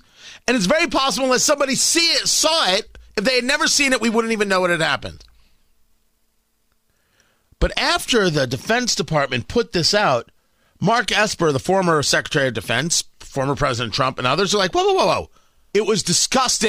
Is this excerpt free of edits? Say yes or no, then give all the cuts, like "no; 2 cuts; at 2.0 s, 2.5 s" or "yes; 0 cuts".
no; 1 cut; at 15.7 s